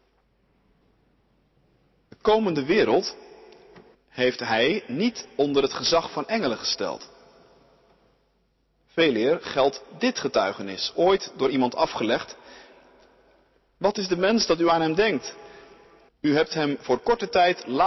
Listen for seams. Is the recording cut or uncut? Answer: cut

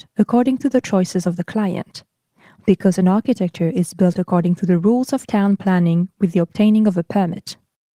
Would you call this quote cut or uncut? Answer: uncut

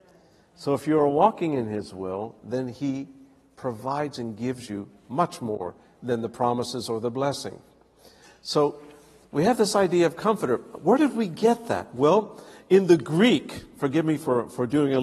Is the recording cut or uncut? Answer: uncut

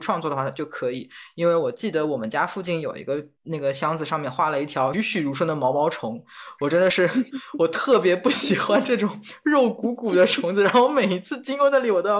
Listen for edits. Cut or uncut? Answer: cut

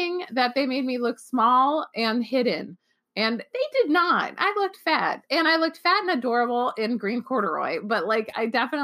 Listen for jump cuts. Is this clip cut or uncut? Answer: uncut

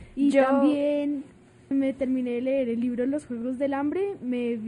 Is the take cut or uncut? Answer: cut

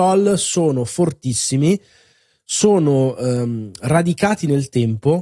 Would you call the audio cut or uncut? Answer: uncut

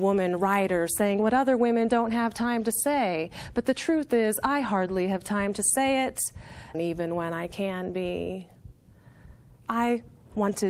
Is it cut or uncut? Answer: cut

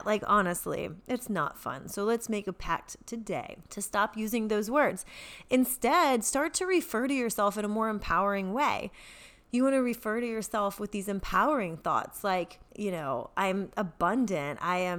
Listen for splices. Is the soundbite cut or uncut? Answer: cut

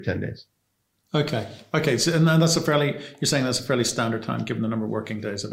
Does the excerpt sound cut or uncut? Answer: uncut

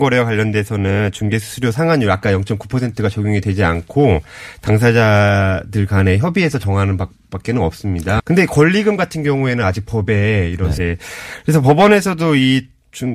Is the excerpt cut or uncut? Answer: cut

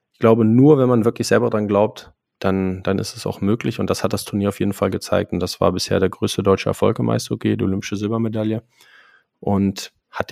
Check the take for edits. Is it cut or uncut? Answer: uncut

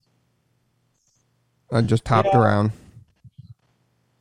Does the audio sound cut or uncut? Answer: uncut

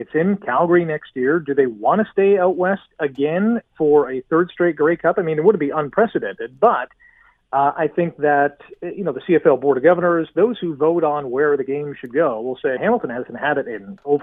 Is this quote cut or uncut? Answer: cut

